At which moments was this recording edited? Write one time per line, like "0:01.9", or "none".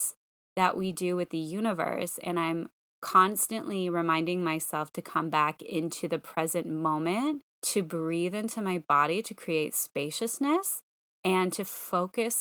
0:07.5